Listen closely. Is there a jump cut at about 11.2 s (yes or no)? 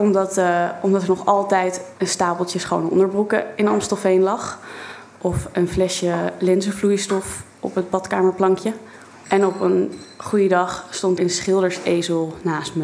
yes